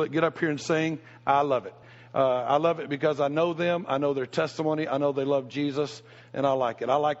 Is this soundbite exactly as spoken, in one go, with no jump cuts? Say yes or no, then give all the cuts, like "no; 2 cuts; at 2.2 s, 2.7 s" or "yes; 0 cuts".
yes; 0 cuts